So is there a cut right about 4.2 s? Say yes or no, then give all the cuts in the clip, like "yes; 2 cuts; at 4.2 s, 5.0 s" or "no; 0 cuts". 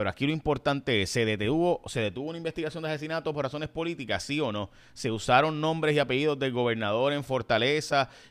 no; 0 cuts